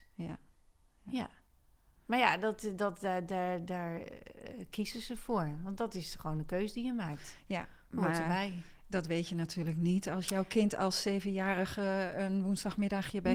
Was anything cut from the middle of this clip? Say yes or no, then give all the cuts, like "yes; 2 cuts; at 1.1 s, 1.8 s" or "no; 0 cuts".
no; 0 cuts